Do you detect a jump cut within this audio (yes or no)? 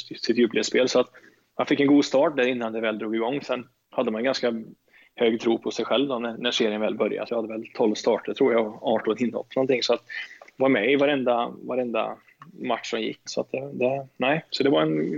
yes